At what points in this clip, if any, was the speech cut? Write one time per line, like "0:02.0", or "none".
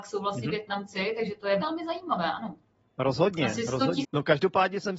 0:01.6
0:04.0